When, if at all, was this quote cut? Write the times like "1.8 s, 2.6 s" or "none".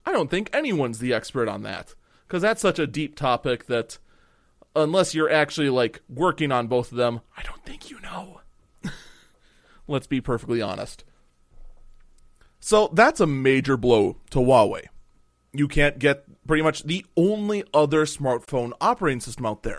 none